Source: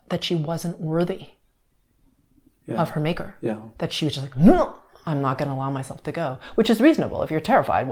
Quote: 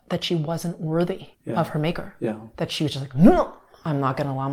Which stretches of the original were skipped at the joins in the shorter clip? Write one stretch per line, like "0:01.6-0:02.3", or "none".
0:01.3-0:02.6